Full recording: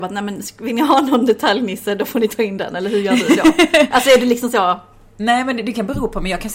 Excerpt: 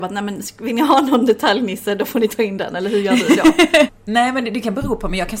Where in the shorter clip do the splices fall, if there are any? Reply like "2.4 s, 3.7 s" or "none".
3.9 s